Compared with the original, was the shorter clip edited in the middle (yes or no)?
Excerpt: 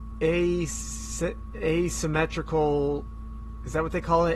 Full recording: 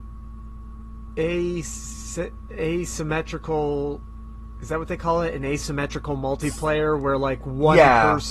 no